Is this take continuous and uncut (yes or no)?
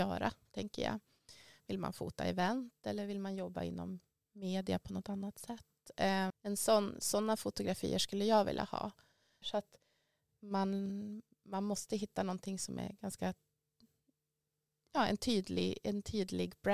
no